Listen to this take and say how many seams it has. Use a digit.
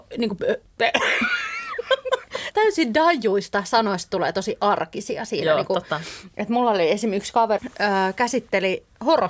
2